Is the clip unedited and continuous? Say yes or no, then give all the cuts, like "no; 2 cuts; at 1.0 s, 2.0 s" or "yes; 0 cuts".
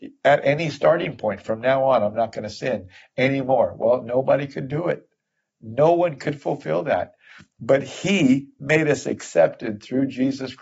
yes; 0 cuts